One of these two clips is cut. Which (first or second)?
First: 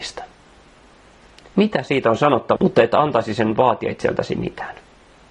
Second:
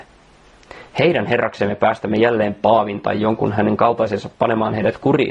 first